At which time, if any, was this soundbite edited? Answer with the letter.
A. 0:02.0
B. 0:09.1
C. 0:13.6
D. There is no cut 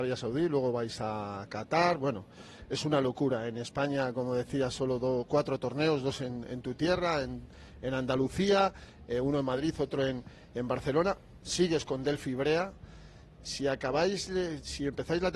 D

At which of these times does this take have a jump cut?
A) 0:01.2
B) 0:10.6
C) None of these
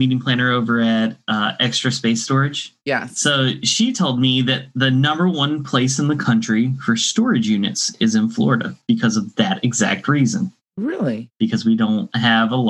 C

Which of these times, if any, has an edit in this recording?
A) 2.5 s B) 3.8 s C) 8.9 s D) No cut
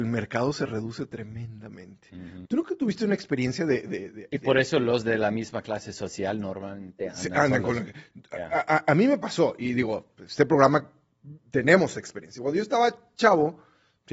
A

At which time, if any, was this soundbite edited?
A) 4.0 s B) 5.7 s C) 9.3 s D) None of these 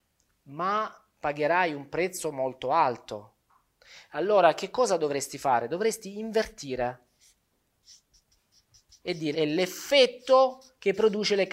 C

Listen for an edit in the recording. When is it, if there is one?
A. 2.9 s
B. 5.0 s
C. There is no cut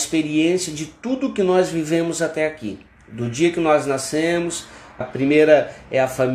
B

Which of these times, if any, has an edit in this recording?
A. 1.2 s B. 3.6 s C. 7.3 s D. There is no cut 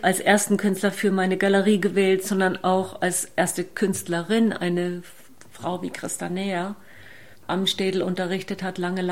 C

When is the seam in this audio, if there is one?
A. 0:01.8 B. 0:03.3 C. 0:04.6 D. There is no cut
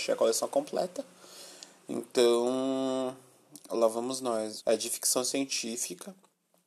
C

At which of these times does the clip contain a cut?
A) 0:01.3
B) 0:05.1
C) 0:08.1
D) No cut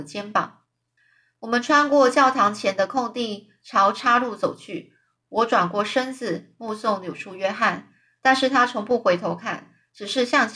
D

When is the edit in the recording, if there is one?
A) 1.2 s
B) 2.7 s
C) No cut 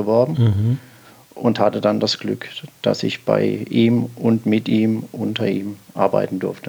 C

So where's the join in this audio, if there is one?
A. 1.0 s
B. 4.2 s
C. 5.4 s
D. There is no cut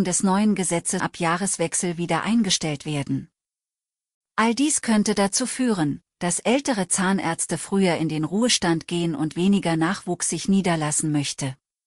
A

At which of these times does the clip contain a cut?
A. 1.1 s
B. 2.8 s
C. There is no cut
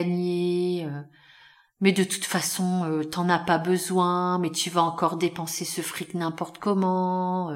C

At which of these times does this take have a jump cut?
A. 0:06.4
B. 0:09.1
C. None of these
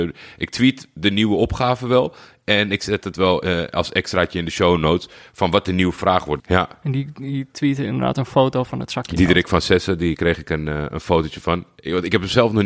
A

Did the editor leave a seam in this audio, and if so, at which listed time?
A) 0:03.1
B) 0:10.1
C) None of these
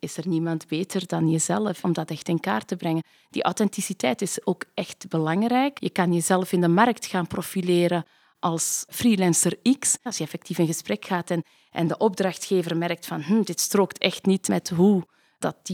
B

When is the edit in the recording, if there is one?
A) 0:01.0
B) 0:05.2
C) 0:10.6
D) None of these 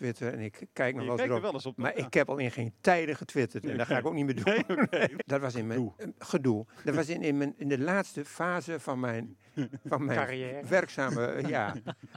B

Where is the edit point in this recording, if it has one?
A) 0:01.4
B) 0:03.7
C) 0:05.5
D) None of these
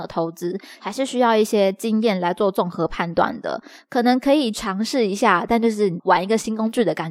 D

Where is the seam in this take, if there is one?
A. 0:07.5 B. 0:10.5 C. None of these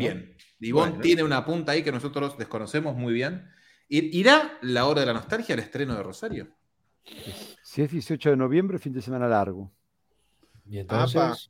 A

